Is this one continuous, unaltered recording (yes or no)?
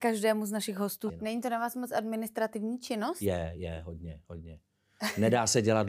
no